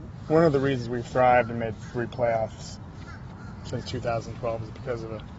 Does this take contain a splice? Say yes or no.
yes